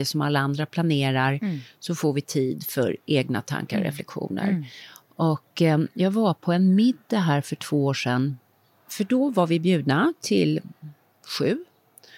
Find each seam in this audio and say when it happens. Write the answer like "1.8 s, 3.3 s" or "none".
none